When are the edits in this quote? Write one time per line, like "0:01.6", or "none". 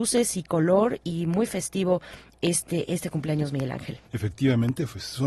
0:04.1